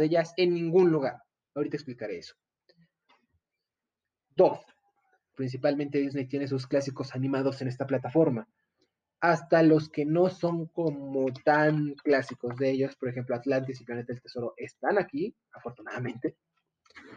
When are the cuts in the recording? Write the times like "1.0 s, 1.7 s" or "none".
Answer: 5.3 s